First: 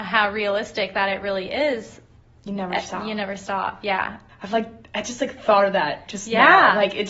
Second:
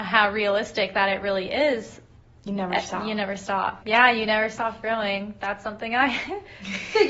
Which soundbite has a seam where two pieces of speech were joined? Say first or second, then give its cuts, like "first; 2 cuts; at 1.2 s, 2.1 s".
second; 1 cut; at 3.8 s